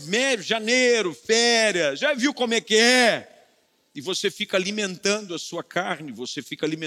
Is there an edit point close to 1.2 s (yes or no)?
no